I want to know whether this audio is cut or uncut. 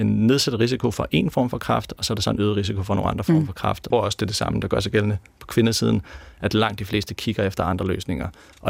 cut